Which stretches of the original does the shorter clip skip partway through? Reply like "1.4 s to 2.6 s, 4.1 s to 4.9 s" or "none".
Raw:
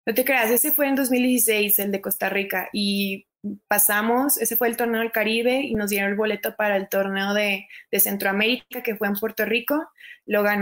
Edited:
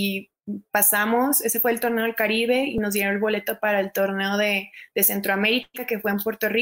none